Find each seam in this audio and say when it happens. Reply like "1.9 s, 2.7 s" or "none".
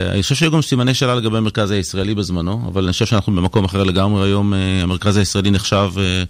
none